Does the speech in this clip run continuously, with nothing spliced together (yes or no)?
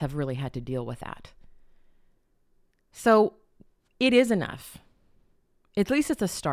yes